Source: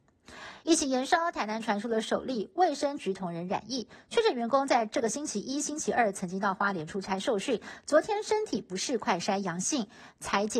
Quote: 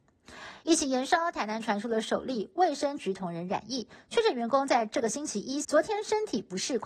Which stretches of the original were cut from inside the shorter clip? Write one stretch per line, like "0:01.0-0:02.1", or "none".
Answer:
0:05.6-0:07.8